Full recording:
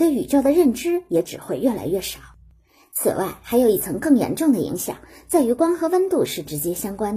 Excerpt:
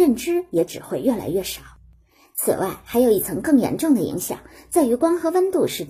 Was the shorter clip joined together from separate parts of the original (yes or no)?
no